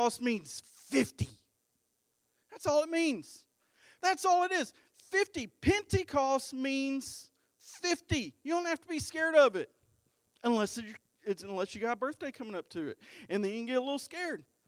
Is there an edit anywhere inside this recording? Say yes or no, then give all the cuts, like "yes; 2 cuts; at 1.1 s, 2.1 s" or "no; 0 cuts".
yes; 1 cut; at 4.0 s